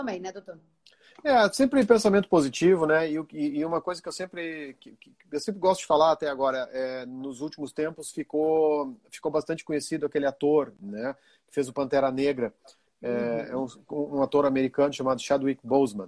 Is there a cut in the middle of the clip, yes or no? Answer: no